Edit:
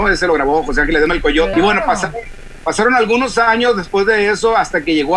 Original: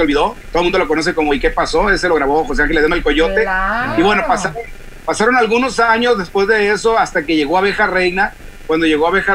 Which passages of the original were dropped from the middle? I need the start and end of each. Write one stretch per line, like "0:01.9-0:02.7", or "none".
0:03.3-0:03.9